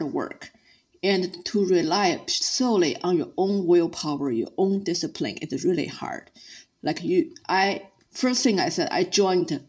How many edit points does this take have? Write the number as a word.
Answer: one